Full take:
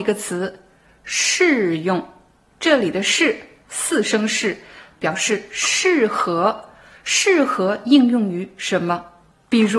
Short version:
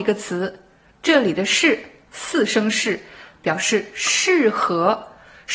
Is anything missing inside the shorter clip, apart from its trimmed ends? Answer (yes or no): yes